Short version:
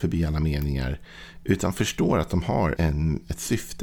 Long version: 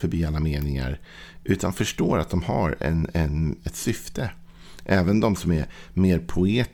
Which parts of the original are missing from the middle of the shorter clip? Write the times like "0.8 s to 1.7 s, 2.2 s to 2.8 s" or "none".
2.8 s to 3.1 s